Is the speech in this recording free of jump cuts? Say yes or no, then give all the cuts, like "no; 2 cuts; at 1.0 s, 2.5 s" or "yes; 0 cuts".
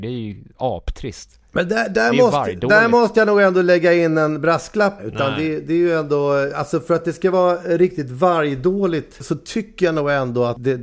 no; 1 cut; at 5.0 s